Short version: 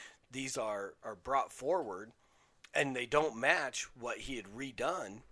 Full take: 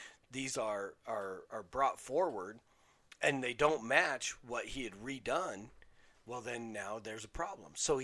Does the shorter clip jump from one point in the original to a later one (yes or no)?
yes